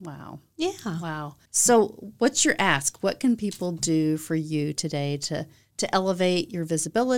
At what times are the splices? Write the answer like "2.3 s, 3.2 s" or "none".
1.5 s